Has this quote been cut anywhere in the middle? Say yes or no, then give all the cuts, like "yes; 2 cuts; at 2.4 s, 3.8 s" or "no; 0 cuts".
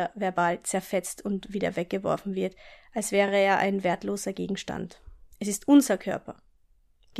no; 0 cuts